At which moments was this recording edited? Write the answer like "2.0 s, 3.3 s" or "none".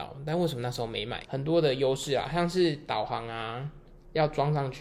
1.2 s